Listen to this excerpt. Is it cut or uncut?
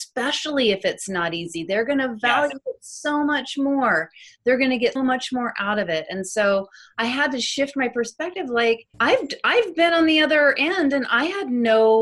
cut